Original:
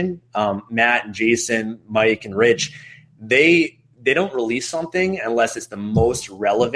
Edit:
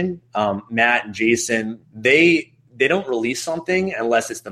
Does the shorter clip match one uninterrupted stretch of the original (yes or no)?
no